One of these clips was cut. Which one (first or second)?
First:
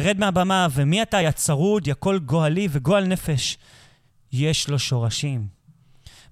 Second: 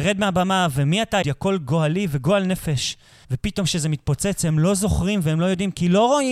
second